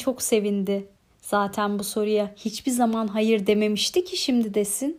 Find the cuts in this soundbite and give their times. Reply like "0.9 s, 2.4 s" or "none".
none